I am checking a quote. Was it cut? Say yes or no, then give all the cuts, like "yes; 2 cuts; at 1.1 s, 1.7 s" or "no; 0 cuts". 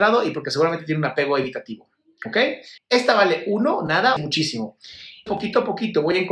yes; 3 cuts; at 2.8 s, 4.2 s, 5.3 s